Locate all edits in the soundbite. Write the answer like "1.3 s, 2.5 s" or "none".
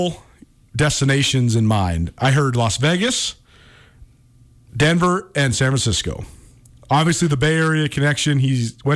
4.7 s

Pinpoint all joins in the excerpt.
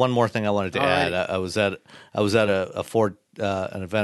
none

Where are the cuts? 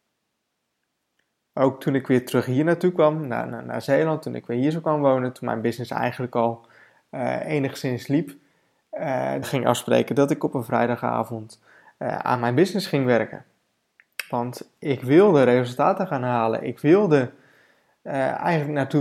9.4 s

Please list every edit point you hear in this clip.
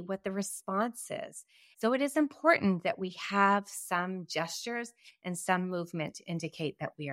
1.7 s

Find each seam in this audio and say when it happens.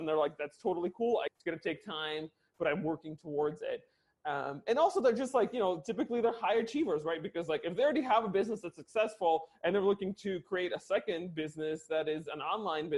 1.3 s

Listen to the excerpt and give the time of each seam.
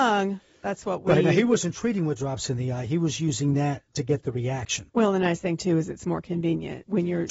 4.9 s

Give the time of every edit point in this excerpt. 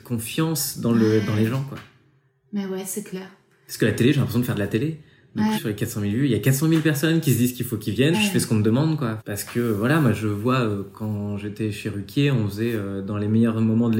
5.5 s, 8.1 s, 9.2 s

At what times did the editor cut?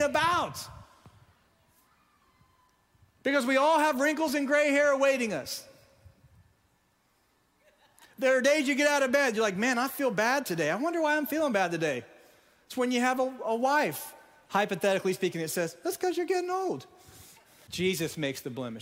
17.7 s

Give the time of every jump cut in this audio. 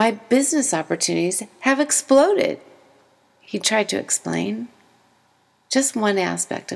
none

